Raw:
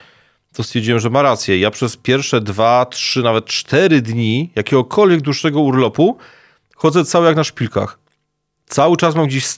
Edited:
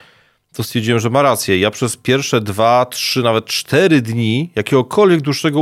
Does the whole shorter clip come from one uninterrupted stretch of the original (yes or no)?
yes